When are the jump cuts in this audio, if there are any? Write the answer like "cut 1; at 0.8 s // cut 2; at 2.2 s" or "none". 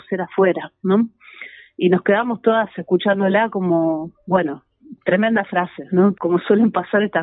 cut 1; at 6.1 s